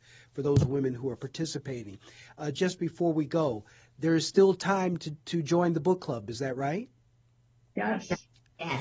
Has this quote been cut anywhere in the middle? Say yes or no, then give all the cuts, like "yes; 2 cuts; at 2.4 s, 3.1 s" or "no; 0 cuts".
no; 0 cuts